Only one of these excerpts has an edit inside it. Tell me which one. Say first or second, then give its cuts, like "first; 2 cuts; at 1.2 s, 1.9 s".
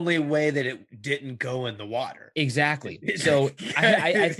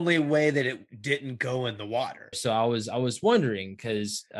second; 1 cut; at 2.3 s